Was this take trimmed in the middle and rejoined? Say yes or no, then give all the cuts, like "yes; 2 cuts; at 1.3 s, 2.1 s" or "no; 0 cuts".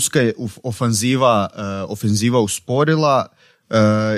no; 0 cuts